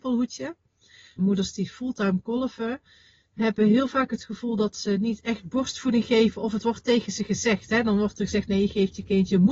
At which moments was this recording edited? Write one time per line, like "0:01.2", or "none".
0:01.2